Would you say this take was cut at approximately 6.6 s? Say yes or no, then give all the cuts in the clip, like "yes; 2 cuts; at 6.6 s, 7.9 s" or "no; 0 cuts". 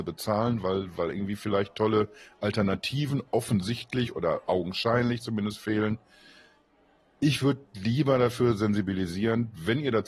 no; 0 cuts